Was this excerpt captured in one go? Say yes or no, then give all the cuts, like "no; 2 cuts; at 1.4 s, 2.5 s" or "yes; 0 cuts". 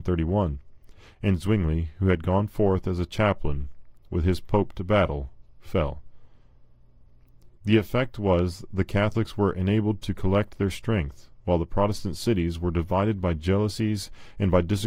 no; 1 cut; at 7.6 s